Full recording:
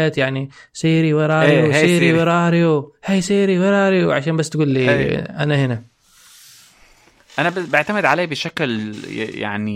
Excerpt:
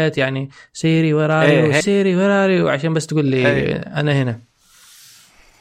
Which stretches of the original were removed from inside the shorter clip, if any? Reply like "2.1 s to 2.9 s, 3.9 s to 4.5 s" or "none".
1.8 s to 3.2 s